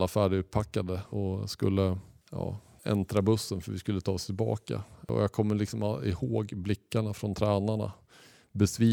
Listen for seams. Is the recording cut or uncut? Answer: cut